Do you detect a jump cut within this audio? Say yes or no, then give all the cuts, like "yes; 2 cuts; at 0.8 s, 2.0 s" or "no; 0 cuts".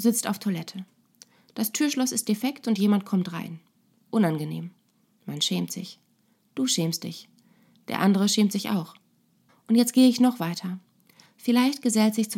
yes; 2 cuts; at 9.5 s, 11.3 s